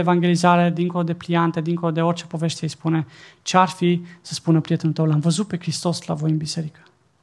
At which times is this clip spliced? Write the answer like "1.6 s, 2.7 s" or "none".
none